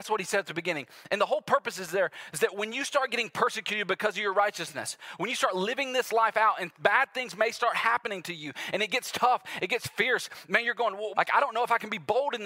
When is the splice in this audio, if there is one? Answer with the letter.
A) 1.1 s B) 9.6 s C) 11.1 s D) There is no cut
C